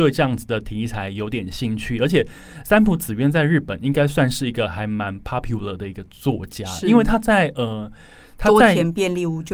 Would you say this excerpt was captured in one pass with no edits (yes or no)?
yes